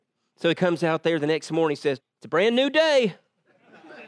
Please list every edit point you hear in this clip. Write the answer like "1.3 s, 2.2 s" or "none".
2.0 s